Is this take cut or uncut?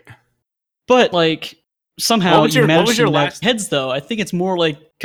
cut